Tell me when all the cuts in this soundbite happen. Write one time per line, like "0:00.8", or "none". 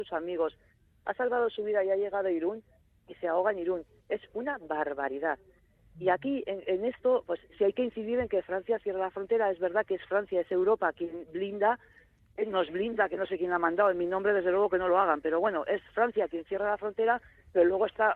none